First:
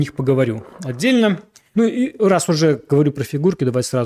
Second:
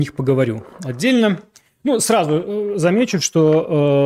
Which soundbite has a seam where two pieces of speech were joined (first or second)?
first